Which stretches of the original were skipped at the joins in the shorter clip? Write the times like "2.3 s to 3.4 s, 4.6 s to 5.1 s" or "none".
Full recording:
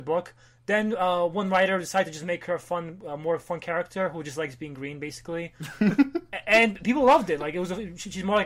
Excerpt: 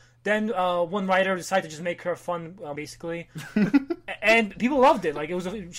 3.2 s to 5.0 s

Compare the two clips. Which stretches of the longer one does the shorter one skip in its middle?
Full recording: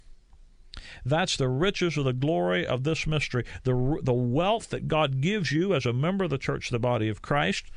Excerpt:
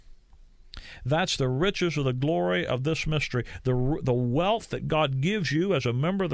none

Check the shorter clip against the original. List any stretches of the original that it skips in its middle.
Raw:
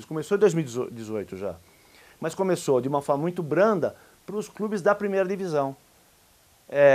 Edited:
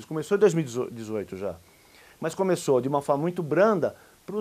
none

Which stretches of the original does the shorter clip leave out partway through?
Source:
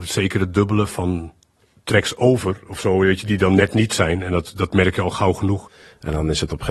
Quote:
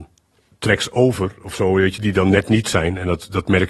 none

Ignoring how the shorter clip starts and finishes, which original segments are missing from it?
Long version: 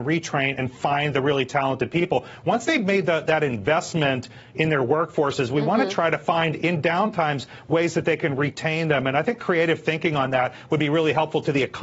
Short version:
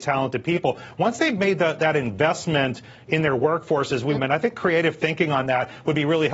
5.6 s to 9.0 s

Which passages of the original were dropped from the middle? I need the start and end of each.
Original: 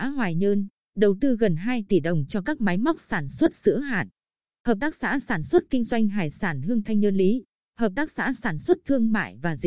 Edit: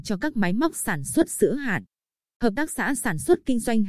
none

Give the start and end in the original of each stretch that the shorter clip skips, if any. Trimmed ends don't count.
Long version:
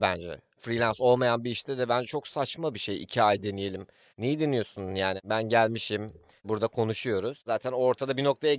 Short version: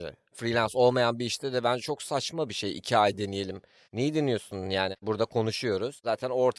5.2 s to 6.4 s

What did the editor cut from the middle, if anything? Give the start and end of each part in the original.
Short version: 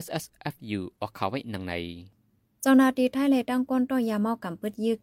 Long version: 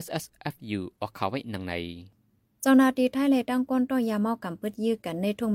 none

